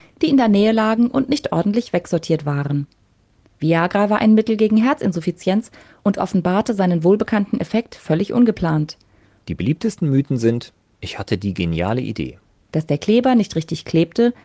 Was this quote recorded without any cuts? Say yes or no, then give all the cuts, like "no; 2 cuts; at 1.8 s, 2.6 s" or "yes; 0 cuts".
no; 2 cuts; at 9.4 s, 12.6 s